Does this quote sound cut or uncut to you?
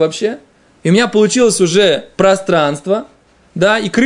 uncut